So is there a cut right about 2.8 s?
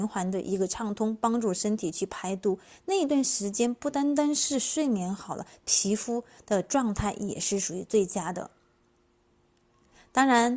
no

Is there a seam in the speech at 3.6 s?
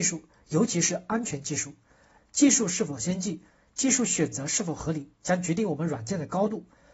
no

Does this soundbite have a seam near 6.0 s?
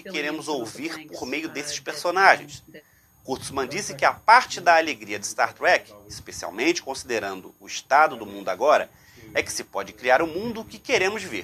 no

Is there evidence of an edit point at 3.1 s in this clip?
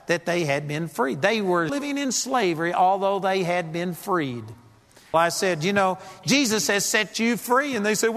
no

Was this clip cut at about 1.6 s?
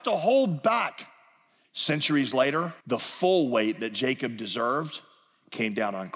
yes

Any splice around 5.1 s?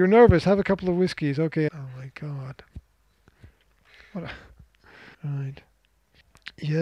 yes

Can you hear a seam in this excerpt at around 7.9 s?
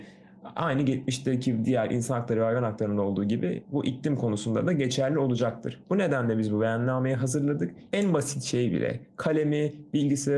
yes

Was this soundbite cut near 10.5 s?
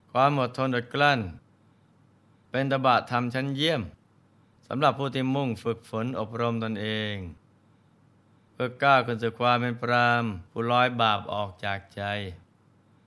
yes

